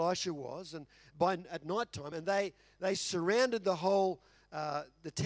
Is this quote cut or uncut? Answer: uncut